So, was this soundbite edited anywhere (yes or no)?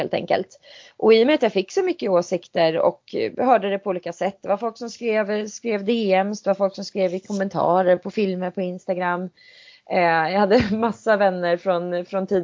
no